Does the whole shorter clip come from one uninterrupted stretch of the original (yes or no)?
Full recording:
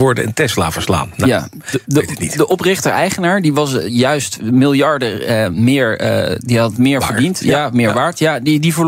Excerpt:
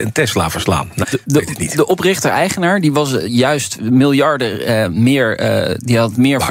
no